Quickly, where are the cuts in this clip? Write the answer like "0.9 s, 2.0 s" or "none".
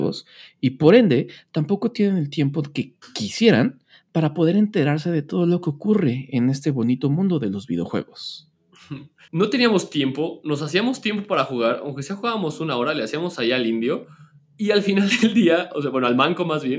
9.3 s